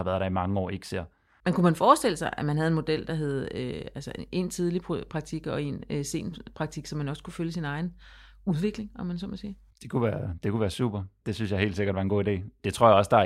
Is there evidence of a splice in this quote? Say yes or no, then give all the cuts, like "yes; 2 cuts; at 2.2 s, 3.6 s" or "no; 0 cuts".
no; 0 cuts